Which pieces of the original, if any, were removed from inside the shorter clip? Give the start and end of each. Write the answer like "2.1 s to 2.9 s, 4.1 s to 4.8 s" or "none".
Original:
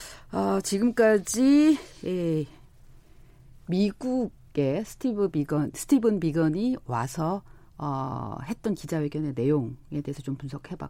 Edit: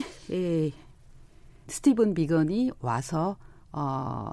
3.4 s to 5.7 s